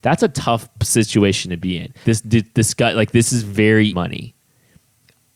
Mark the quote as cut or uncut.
cut